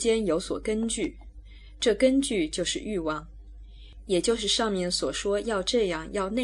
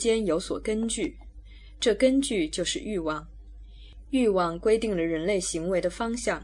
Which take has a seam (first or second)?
first